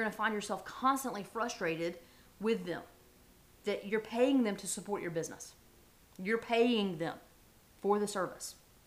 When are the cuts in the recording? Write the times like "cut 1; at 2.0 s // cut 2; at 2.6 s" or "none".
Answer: cut 1; at 3.5 s